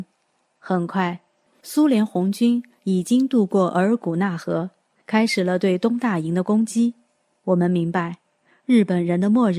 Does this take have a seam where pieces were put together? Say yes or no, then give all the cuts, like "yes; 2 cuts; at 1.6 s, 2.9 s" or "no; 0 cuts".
no; 0 cuts